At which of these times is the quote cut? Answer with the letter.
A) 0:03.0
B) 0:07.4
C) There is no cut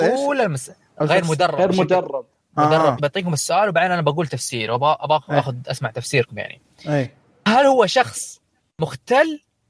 A